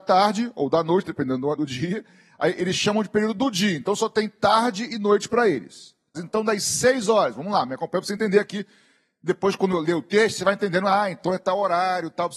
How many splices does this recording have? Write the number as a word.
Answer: two